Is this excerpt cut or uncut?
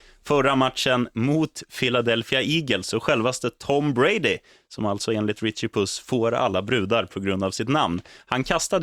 uncut